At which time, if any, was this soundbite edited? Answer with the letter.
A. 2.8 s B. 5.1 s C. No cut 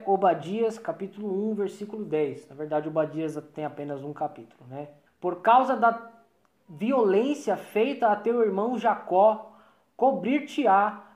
B